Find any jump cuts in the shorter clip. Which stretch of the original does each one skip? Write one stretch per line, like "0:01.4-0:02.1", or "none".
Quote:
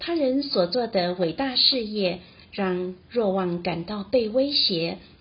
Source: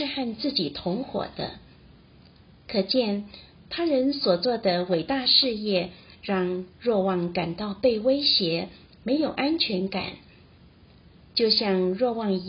none